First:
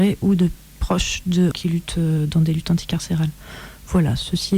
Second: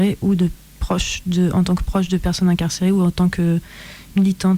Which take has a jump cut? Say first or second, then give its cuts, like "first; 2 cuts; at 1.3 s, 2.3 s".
first; 1 cut; at 1.5 s